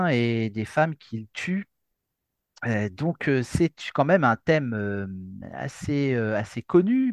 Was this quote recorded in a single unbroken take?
yes; 0 cuts

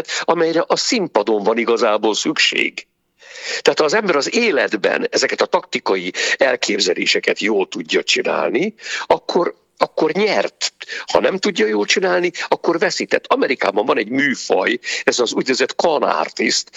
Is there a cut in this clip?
no; 0 cuts

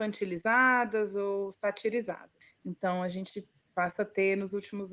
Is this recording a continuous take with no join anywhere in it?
yes; 0 cuts

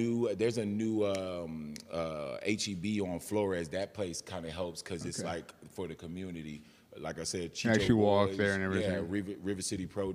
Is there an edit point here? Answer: no; 0 cuts

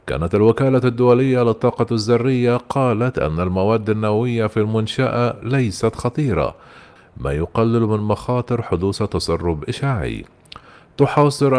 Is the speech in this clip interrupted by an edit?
yes; 1 cut; at 7.0 s

